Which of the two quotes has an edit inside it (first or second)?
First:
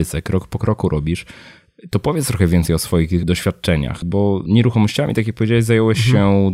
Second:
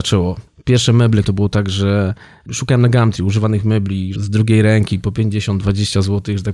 second